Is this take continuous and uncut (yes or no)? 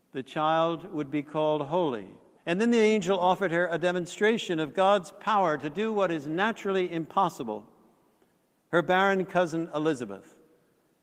no